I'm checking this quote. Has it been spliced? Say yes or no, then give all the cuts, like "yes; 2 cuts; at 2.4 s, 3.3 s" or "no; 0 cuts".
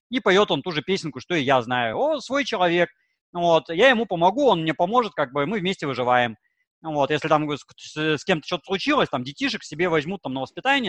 no; 0 cuts